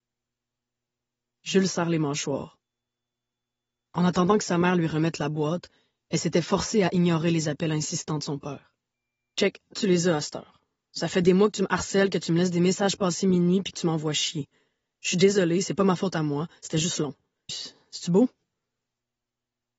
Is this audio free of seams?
no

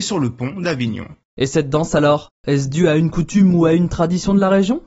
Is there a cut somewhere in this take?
no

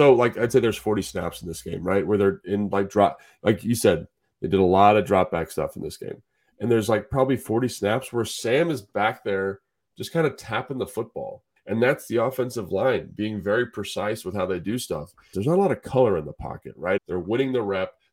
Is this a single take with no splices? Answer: no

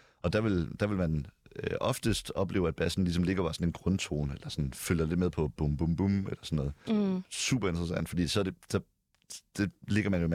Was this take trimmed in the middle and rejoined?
yes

